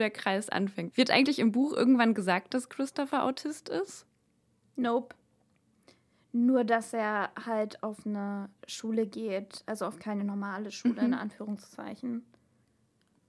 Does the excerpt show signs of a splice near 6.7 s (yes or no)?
no